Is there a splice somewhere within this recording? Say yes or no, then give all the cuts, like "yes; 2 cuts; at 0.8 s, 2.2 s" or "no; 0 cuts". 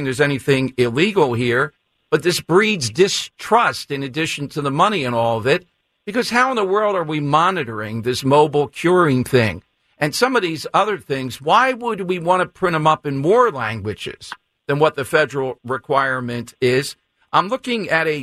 no; 0 cuts